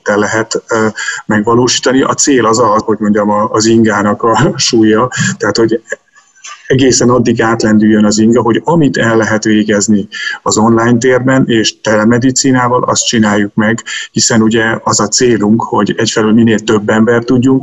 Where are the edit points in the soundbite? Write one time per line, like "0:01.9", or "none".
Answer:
0:02.8